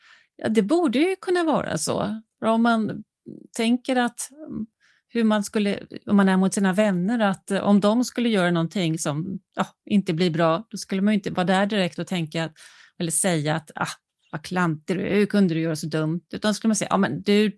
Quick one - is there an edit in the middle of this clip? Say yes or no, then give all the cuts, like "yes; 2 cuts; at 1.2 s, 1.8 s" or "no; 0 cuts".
no; 0 cuts